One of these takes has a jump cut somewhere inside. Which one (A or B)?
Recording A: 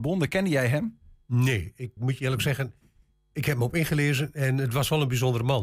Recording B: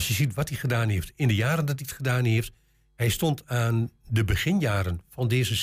A